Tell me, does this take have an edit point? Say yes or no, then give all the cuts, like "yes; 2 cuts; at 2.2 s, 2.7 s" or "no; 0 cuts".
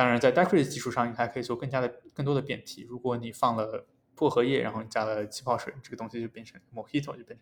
no; 0 cuts